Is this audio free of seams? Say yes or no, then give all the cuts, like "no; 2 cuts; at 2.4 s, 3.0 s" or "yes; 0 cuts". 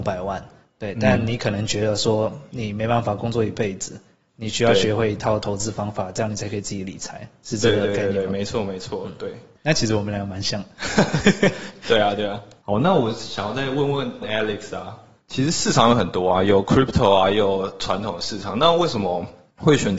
yes; 0 cuts